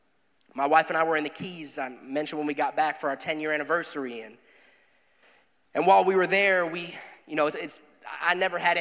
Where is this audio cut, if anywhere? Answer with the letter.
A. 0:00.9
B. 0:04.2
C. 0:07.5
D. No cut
D